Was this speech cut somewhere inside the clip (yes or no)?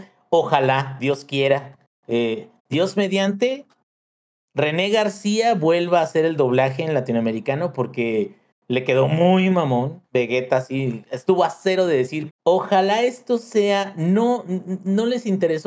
yes